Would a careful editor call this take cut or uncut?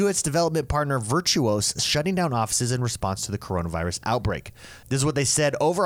uncut